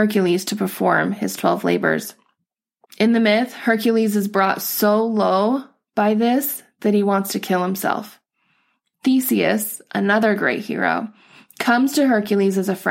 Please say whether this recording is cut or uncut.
cut